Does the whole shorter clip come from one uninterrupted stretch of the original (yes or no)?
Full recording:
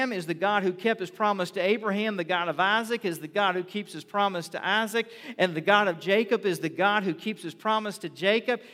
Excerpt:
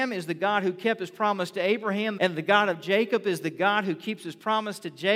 no